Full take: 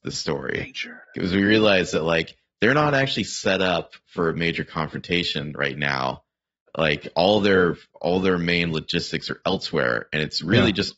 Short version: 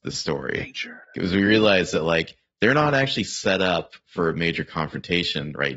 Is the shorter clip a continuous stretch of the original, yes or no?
yes